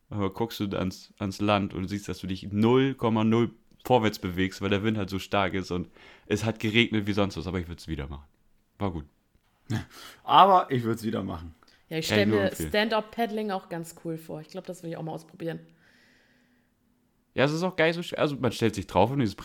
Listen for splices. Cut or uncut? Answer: uncut